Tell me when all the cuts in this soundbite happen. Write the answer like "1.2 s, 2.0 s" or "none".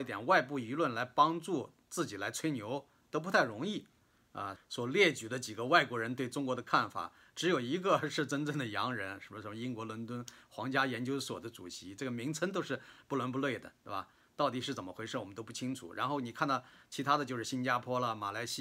4.6 s